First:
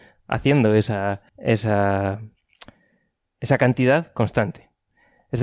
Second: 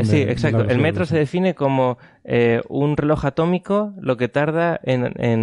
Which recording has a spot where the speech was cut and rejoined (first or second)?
first